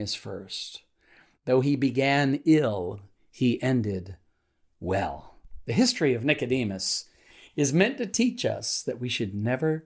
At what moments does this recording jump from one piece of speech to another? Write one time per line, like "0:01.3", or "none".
none

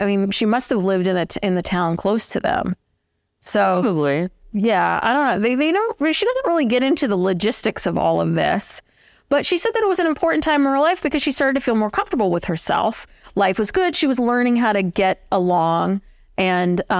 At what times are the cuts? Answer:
none

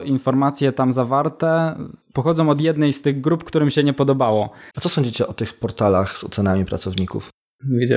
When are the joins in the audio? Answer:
0:02.0
0:04.7

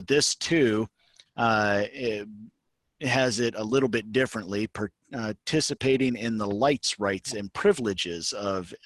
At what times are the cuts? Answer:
none

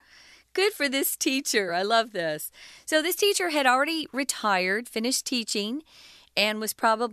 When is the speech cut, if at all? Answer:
none

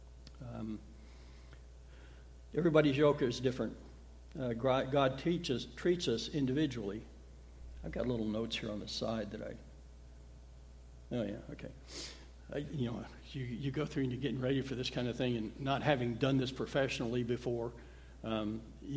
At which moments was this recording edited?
0:02.5

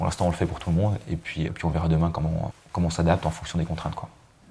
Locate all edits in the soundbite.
0:01.5
0:02.5

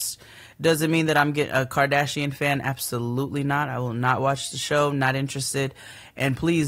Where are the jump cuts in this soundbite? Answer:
none

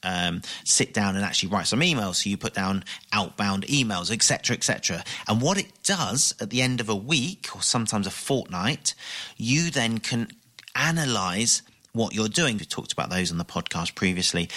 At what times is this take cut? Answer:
0:05.2
0:12.6

